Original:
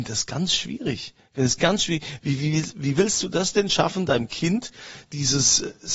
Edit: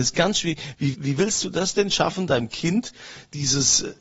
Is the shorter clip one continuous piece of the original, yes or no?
no